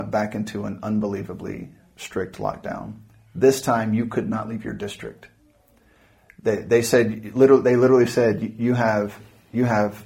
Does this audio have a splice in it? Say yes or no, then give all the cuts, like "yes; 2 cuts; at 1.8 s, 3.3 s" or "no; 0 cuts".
no; 0 cuts